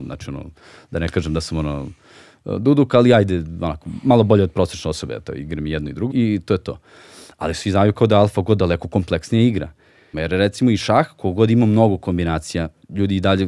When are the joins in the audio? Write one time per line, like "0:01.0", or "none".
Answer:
0:06.1
0:10.1